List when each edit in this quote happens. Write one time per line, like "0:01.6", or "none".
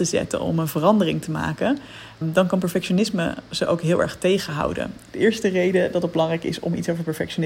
0:02.2
0:05.1